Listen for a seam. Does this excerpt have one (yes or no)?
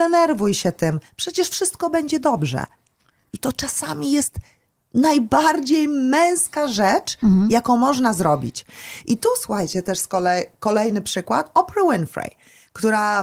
no